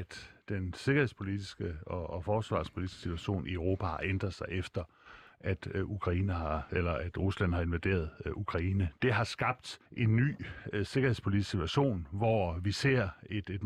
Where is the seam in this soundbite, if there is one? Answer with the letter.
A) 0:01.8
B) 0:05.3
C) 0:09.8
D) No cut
C